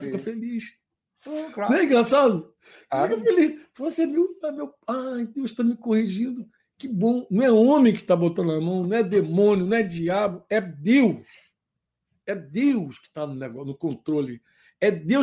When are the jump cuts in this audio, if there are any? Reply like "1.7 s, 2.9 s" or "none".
none